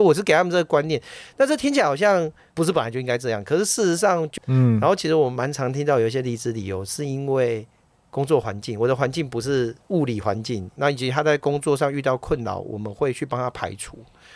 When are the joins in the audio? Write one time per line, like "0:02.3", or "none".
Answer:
0:04.4
0:10.8